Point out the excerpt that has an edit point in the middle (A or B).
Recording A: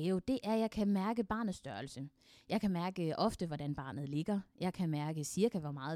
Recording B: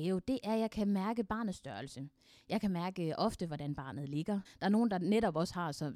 B